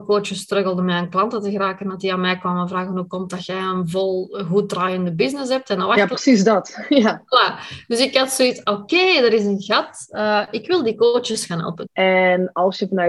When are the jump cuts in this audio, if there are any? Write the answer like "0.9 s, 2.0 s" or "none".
11.9 s